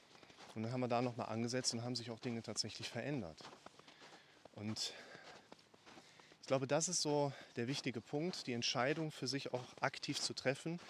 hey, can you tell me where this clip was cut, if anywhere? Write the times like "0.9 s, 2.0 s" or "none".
none